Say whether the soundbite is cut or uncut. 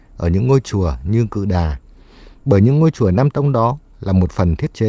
uncut